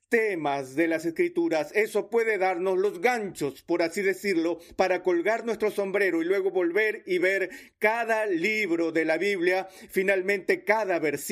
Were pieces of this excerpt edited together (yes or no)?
no